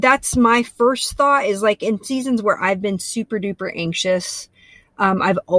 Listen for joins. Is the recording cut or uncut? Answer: uncut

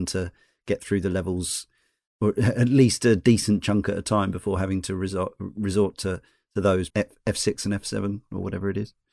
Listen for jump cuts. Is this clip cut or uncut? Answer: cut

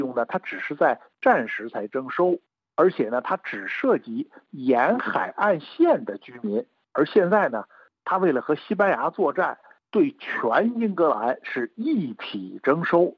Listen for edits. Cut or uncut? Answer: uncut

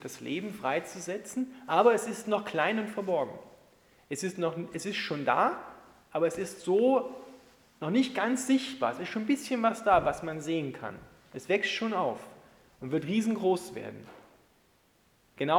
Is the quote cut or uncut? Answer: uncut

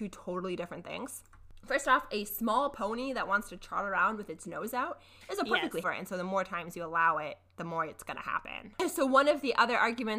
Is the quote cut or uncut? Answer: cut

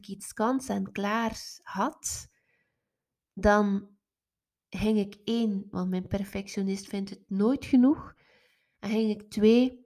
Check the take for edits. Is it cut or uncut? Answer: cut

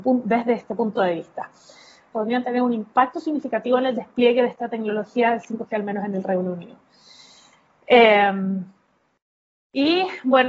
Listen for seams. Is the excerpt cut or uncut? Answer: cut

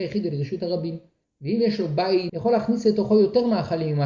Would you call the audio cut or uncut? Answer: cut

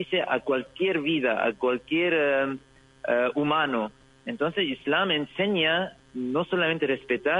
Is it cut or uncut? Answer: cut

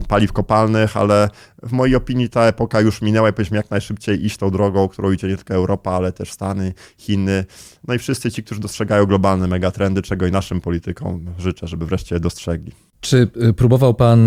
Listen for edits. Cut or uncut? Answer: uncut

